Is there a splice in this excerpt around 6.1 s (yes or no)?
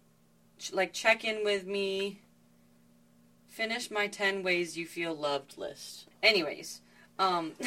yes